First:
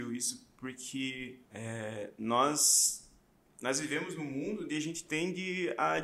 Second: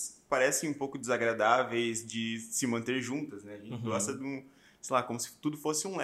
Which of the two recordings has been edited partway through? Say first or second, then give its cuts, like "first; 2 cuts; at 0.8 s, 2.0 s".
first; 1 cut; at 1.5 s